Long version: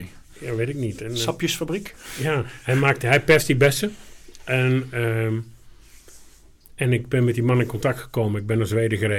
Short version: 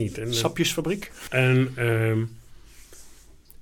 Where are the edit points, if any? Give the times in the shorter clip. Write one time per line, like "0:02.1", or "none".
0:01.3